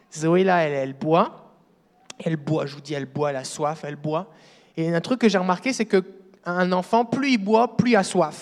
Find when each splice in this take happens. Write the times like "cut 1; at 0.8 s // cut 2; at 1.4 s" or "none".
none